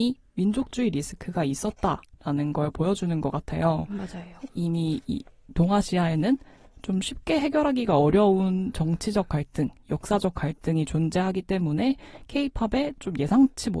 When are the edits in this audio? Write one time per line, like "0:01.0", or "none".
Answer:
none